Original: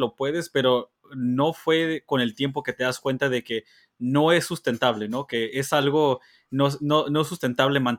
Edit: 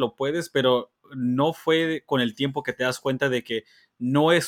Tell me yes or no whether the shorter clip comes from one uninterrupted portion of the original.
yes